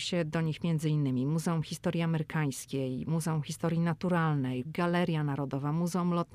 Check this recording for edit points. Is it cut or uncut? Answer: cut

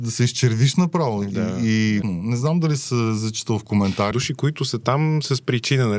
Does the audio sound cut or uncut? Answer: cut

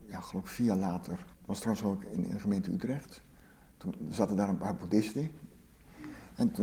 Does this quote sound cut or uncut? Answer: cut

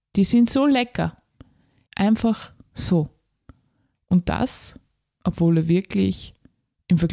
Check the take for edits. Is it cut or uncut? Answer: cut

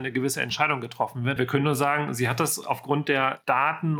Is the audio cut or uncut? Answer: cut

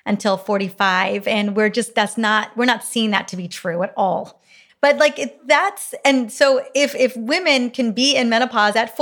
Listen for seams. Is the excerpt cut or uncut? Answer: cut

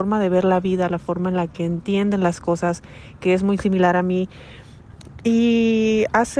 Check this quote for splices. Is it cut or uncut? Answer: uncut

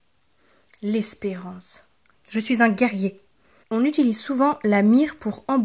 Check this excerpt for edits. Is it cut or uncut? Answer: cut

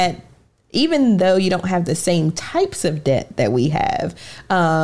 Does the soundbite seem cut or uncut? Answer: uncut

